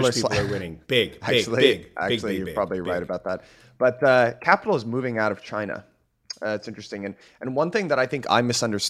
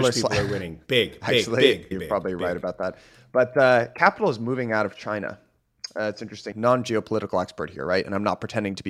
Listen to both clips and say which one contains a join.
second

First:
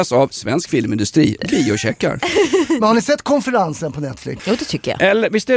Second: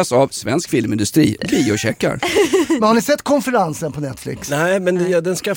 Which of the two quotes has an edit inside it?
first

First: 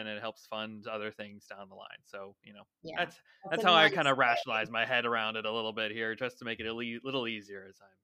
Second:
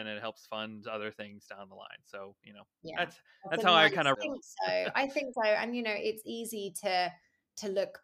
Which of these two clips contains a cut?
second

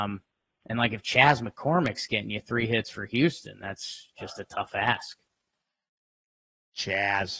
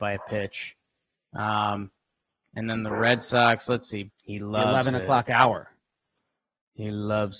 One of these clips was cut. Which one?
second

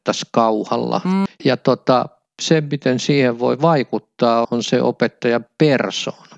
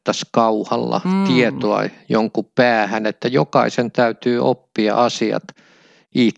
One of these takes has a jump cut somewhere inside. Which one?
first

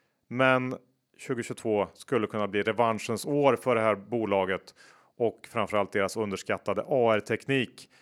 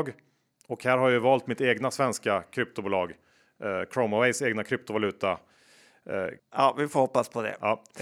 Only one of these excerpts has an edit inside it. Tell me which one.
second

